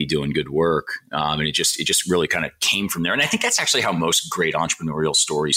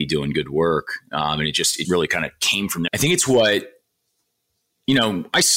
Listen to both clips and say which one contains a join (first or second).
second